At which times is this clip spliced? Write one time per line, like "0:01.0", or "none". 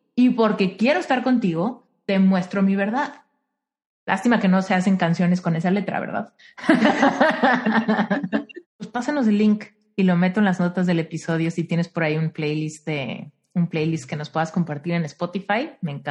0:08.6

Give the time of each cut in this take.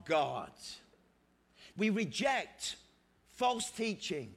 0:01.7

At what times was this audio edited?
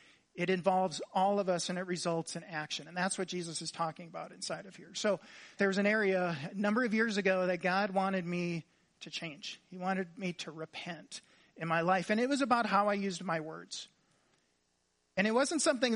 0:05.6

